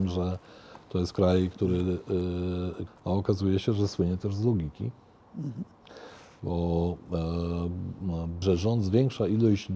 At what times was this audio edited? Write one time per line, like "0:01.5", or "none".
0:02.9
0:08.4

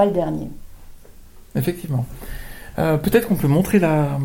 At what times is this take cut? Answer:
none

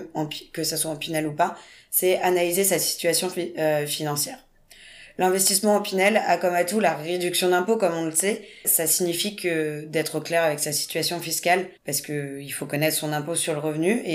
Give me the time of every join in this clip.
0:08.6
0:11.8

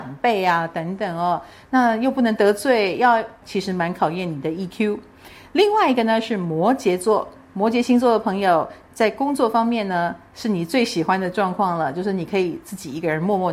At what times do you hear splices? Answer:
0:03.4

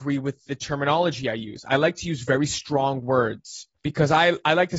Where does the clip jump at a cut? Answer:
0:03.7

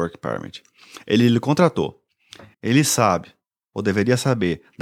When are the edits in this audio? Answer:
0:02.5

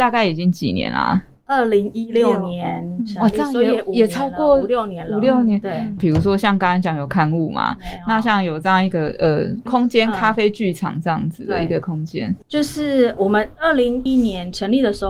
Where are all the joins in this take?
0:06.0
0:14.1

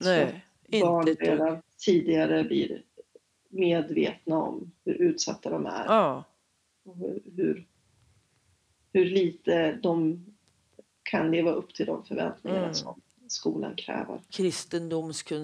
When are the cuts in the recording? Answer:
0:04.8
0:14.3

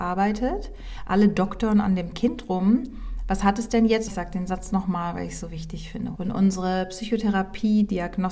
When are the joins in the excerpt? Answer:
0:04.1
0:06.2

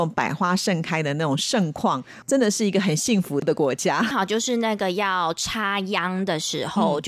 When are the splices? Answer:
0:04.1

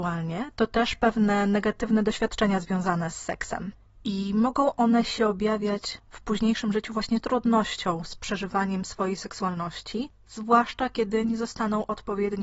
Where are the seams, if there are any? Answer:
none

